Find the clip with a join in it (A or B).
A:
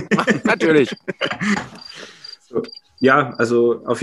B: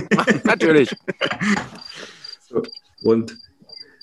B